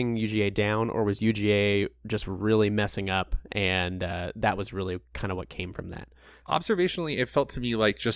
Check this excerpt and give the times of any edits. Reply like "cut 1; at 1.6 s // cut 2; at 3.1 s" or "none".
cut 1; at 6.4 s

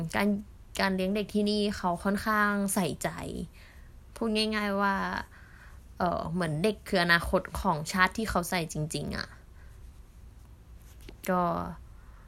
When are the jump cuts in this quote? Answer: cut 1; at 8.7 s

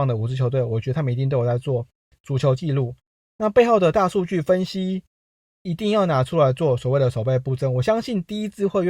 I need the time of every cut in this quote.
none

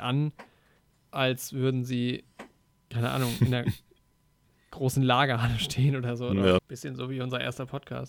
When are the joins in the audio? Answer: cut 1; at 6.6 s

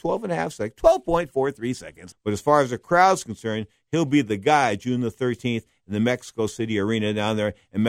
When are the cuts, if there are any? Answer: cut 1; at 2.1 s

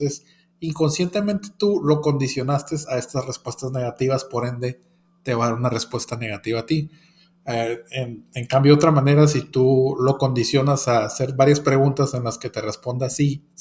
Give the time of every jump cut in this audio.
none

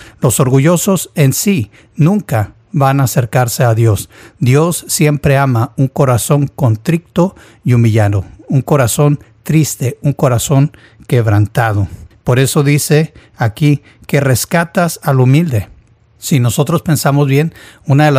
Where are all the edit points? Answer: none

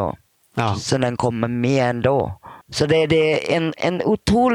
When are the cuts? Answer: cut 1; at 2.6 s

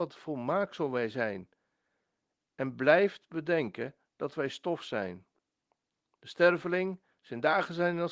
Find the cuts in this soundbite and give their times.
none

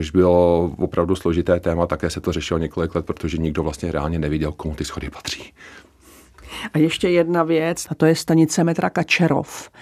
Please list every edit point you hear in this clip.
cut 1; at 7.9 s

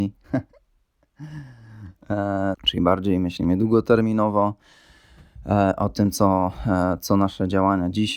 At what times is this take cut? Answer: cut 1; at 2.5 s

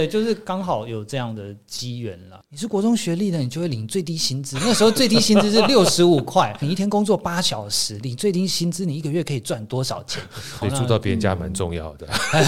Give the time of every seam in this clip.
cut 1; at 2.4 s // cut 2; at 6.6 s // cut 3; at 10.6 s

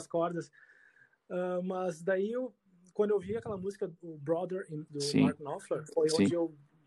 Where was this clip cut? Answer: cut 1; at 4.9 s

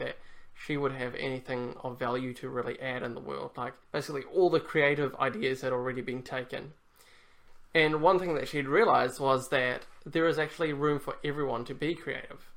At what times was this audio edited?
cut 1; at 3.8 s

